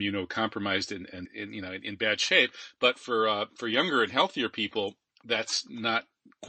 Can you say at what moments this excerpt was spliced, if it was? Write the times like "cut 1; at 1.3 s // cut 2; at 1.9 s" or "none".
cut 1; at 1.2 s